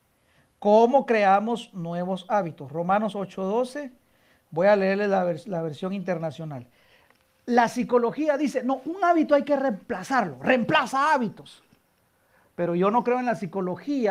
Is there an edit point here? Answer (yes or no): no